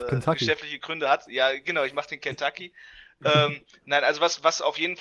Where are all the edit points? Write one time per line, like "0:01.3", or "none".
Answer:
none

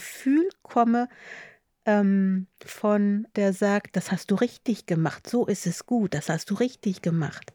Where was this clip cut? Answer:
0:03.3

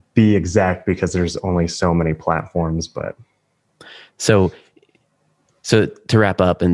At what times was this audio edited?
none

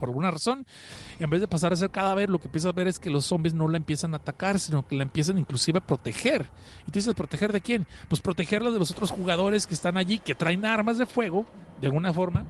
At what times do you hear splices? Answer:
none

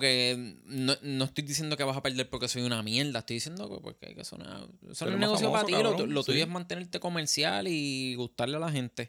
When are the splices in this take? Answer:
none

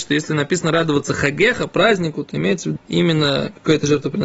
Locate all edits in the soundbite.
0:02.8

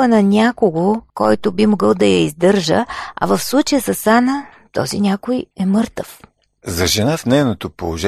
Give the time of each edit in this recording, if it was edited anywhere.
none

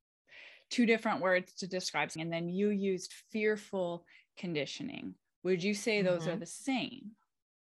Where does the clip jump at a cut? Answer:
0:02.2

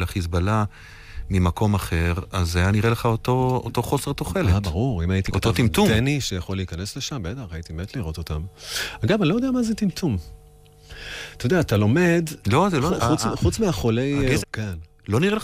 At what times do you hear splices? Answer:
0:12.4
0:14.4

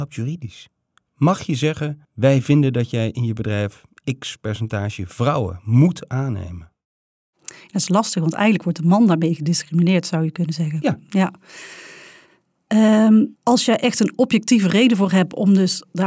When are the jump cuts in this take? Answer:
0:02.0

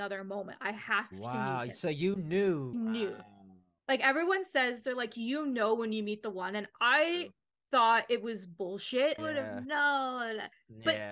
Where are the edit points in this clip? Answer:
0:02.7
0:09.2

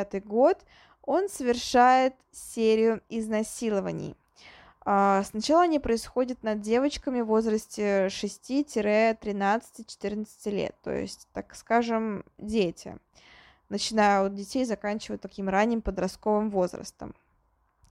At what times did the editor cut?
0:12.4

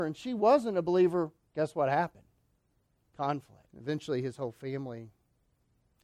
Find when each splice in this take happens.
0:03.7

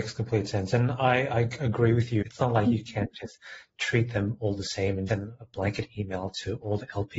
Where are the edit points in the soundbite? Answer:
0:02.2
0:05.1

